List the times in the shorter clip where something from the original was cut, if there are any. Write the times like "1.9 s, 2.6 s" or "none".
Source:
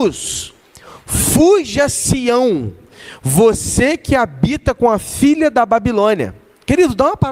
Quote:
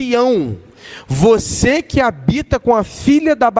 none